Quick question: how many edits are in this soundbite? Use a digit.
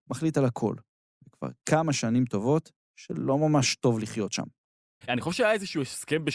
1